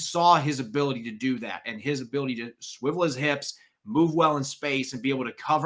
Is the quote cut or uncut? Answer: uncut